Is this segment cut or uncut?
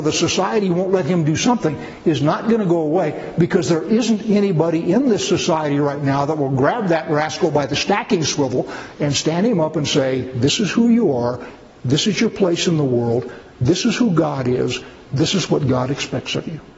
uncut